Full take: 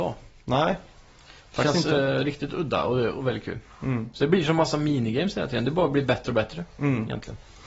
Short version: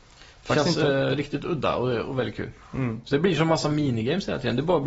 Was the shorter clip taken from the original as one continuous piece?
yes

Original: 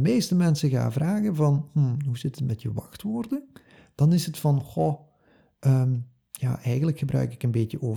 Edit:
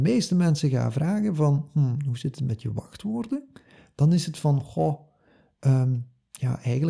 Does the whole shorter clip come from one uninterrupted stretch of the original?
yes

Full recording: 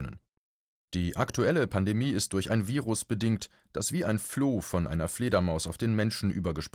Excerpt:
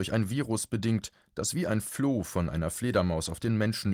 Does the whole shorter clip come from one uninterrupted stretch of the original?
yes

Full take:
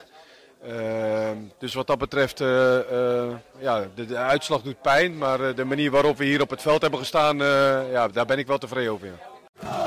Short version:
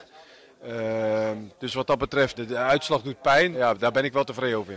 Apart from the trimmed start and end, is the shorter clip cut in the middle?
yes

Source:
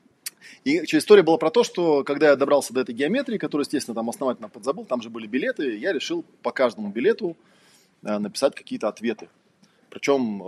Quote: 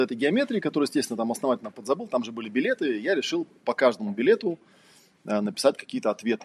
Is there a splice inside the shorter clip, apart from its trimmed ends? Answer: no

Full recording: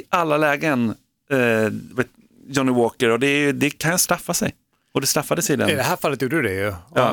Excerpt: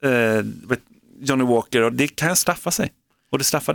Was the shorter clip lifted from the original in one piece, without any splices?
no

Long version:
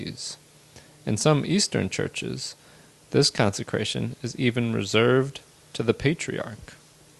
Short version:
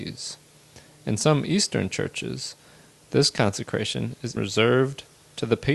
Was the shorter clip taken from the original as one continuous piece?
no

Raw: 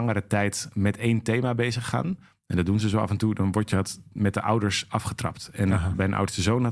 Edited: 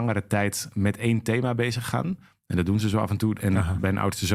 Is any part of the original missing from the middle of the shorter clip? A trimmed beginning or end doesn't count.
yes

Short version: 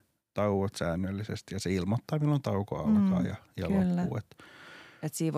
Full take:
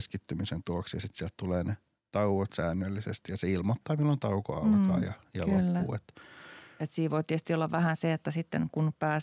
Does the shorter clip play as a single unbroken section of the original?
yes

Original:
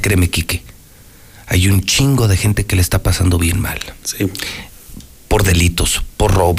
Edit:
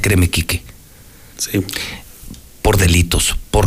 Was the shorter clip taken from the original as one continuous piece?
no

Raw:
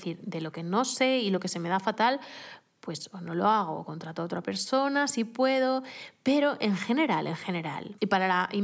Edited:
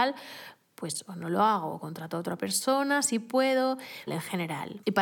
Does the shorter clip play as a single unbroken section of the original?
no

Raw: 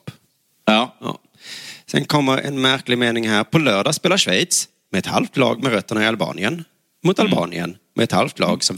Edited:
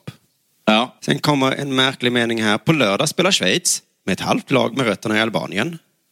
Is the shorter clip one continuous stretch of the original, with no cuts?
no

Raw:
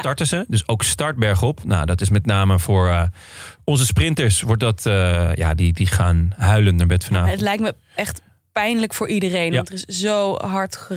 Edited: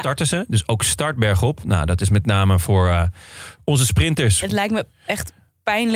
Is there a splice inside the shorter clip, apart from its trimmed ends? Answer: yes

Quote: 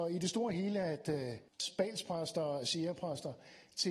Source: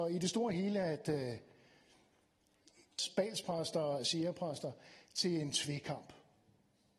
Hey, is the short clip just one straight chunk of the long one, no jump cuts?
no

